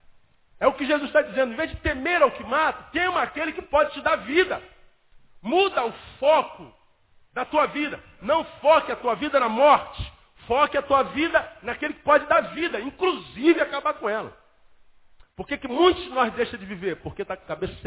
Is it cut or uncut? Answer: uncut